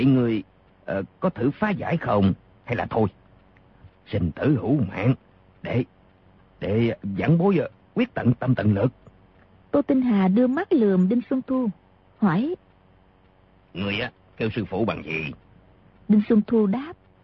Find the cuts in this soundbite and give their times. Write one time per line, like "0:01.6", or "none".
0:03.9
0:09.6

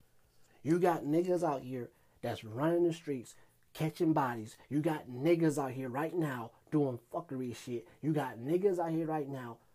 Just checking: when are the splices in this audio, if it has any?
none

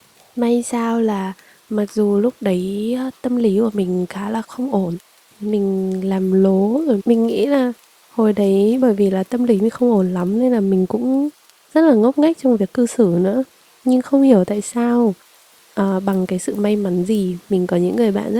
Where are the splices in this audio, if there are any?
0:04.4
0:07.0

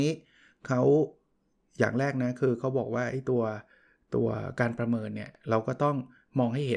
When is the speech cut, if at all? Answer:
none

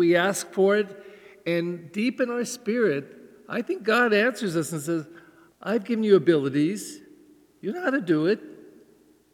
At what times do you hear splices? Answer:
0:05.5

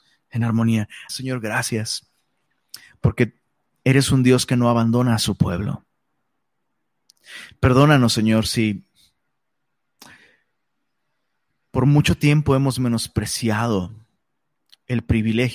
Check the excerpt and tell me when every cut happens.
0:01.1

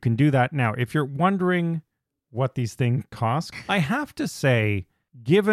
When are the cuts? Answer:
0:03.5

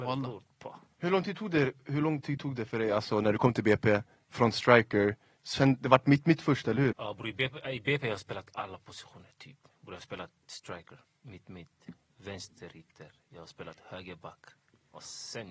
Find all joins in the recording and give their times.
0:06.9
0:11.0

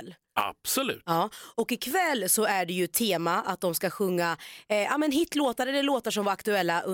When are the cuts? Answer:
none

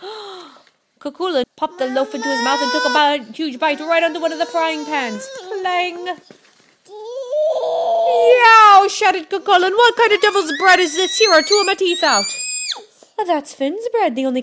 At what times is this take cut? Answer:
0:01.4

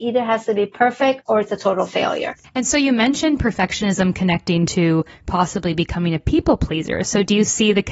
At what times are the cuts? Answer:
0:02.4

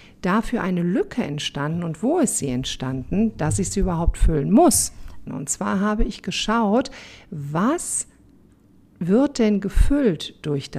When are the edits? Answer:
0:05.3

